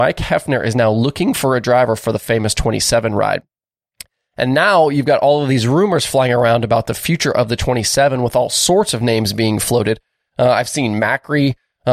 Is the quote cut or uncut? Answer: uncut